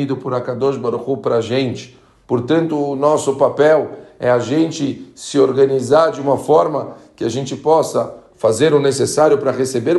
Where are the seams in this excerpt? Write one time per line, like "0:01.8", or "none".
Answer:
0:08.3